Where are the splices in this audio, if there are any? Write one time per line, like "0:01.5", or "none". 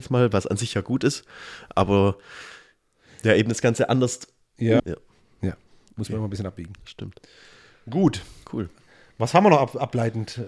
0:04.8